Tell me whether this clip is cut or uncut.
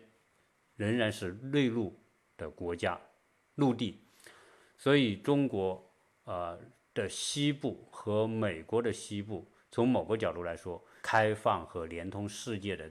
cut